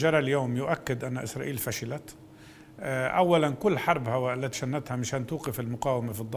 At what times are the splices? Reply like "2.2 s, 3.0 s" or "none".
4.5 s